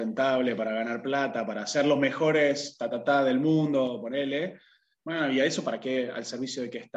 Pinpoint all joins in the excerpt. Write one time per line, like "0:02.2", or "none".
none